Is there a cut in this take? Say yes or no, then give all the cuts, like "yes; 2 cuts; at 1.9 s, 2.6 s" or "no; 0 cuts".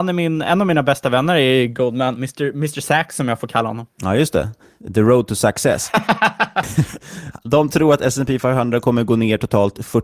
no; 0 cuts